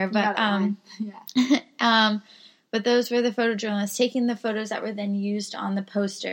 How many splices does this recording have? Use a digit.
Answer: 0